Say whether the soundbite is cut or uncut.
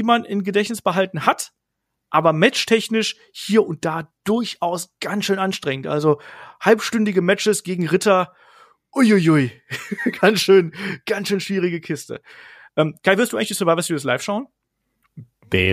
uncut